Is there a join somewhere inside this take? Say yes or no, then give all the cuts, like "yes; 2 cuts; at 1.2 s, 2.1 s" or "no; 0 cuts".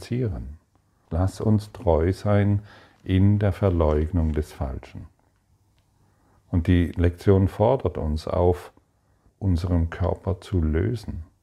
yes; 3 cuts; at 1.1 s, 6.4 s, 9.3 s